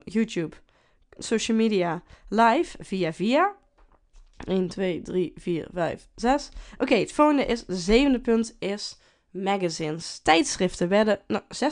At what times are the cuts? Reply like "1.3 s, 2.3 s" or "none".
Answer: 1.2 s